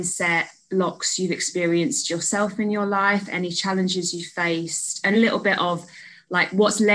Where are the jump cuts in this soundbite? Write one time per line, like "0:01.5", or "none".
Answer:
0:05.1